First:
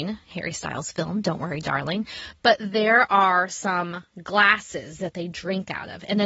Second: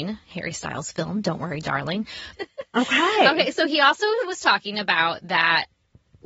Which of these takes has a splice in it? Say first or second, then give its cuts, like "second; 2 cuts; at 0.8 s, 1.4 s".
second; 1 cut; at 2.3 s